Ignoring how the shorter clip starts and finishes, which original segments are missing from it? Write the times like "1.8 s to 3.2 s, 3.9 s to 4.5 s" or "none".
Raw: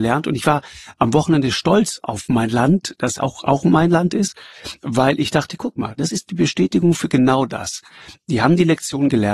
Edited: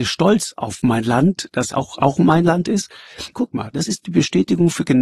4.8 s to 5.6 s